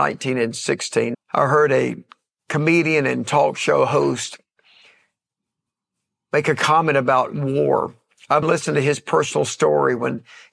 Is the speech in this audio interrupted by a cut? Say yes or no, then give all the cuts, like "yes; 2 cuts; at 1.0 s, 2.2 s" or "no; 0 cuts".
yes; 2 cuts; at 1.1 s, 8.4 s